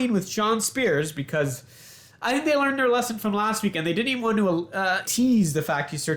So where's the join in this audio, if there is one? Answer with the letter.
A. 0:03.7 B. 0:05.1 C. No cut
B